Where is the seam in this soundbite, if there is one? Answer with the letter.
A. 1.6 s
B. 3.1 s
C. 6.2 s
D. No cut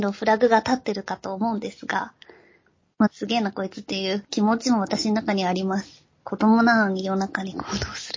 B